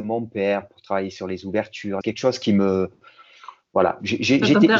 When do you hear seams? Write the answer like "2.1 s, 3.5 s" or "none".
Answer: 2.0 s